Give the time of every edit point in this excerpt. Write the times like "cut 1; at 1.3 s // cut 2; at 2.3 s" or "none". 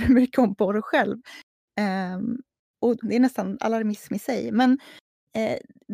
cut 1; at 3.0 s